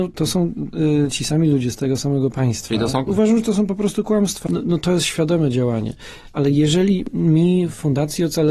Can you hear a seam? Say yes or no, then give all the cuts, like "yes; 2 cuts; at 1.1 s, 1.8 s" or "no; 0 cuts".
yes; 2 cuts; at 3.1 s, 4.5 s